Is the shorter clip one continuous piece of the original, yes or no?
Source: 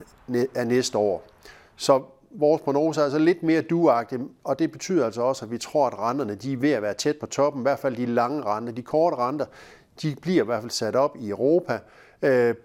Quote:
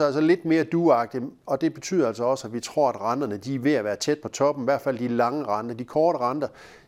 yes